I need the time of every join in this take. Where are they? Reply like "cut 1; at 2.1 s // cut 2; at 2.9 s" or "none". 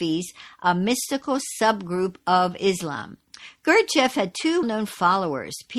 cut 1; at 4.6 s